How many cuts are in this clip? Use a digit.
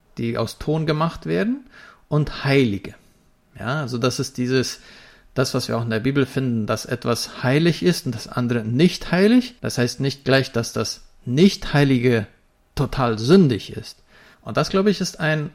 2